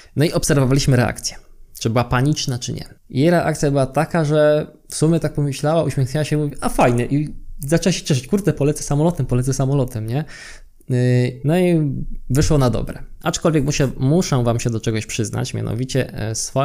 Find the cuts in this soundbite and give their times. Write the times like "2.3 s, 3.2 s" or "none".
3.0 s, 11.4 s, 13.2 s